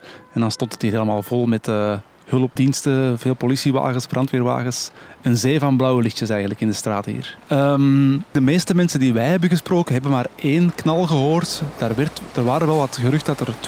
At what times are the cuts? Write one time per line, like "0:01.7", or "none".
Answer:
none